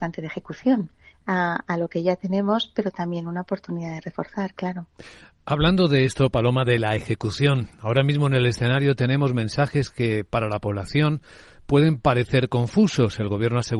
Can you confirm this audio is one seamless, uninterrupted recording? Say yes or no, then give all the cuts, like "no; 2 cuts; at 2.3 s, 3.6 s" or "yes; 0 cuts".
yes; 0 cuts